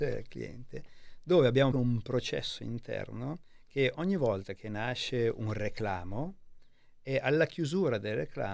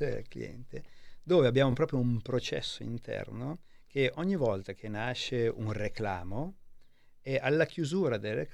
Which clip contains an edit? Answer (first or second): first